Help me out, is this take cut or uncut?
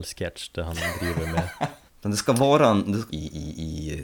cut